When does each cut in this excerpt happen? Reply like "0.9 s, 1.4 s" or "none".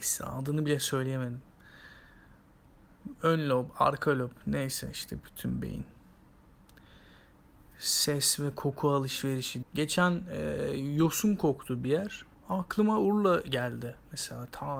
9.6 s